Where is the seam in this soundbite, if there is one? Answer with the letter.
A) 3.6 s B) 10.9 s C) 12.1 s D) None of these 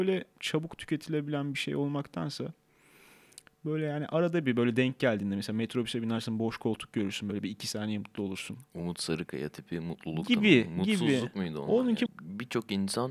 C